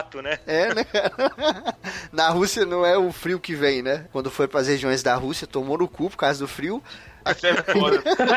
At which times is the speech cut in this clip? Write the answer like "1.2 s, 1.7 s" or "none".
4.1 s, 7.3 s